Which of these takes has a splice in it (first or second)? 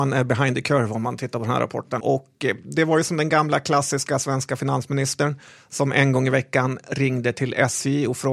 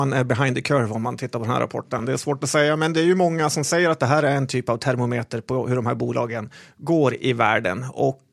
first